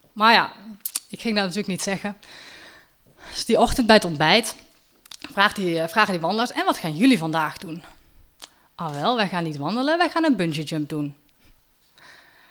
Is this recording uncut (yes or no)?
yes